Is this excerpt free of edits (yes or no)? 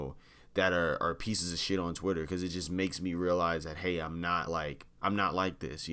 yes